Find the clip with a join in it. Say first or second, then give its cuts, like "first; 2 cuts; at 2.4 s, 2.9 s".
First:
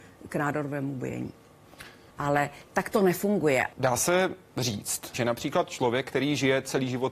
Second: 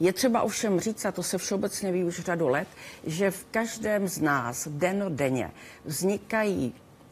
first; 3 cuts; at 2.1 s, 3.7 s, 5.1 s